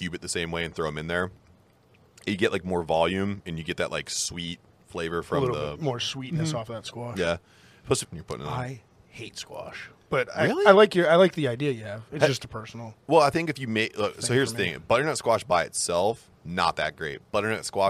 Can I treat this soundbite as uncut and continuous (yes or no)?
no